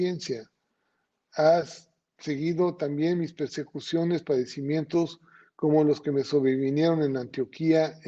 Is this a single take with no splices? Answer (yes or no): yes